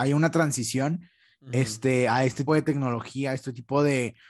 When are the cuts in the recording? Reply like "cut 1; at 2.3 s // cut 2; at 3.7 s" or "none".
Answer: cut 1; at 2.5 s

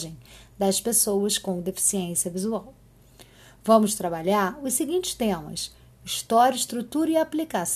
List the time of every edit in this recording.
none

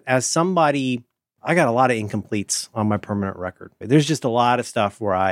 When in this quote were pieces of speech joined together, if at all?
cut 1; at 1.4 s // cut 2; at 3.8 s

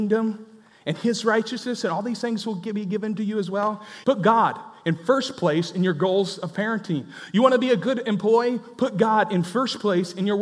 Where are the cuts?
cut 1; at 4.0 s

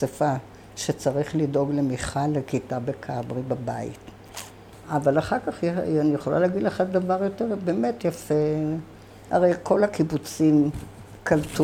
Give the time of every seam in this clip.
cut 1; at 4.7 s

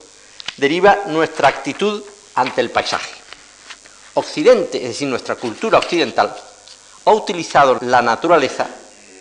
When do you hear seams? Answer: cut 1; at 7.8 s

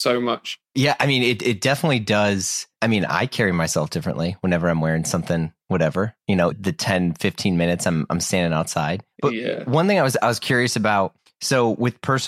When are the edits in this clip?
cut 1; at 6.5 s

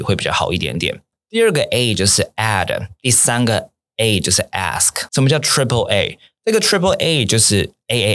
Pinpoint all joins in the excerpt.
cut 1; at 1.1 s // cut 2; at 5.1 s

